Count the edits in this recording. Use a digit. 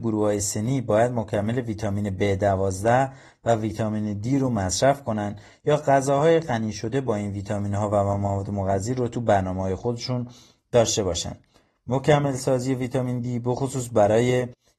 0